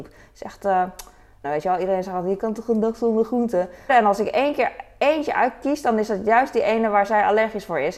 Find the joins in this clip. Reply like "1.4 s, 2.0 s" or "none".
1.4 s, 3.9 s

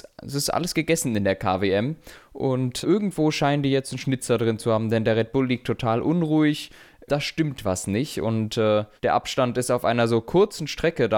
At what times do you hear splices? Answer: 2.8 s, 7.1 s, 9.0 s

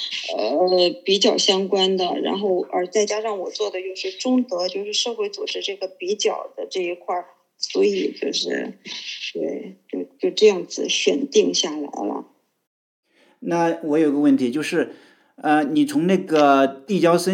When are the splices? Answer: none

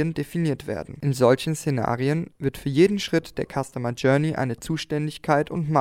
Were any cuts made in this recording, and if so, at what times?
none

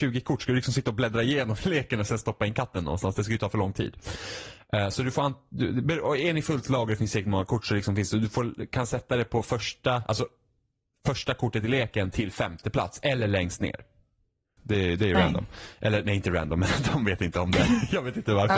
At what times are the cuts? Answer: 14.6 s

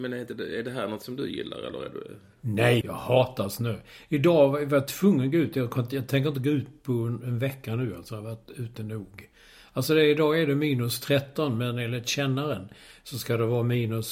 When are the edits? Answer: 2.8 s

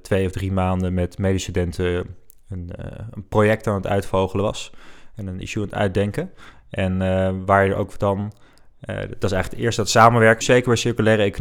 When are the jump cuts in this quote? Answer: 10.4 s

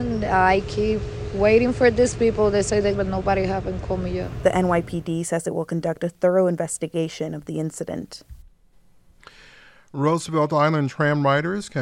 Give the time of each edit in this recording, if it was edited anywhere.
2.9 s

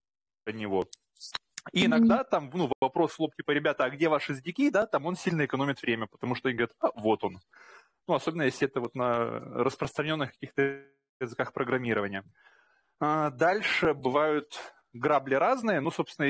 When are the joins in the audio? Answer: none

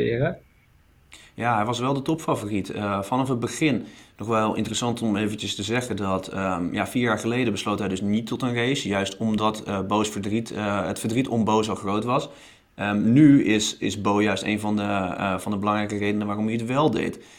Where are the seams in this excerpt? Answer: none

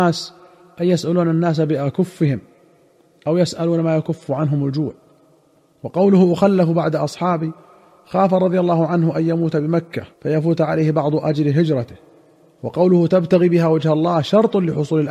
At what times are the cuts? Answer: 10.1 s

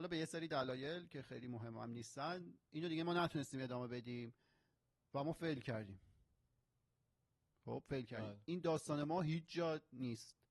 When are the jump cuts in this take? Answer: none

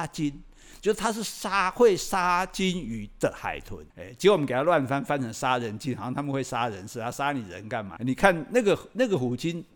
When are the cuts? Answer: 3.9 s, 8.0 s

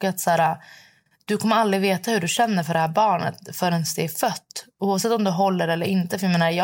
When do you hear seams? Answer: none

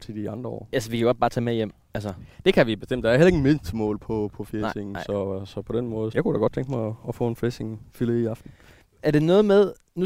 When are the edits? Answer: 6.1 s

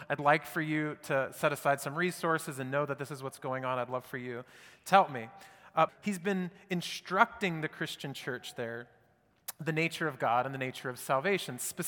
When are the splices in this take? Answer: 5.9 s

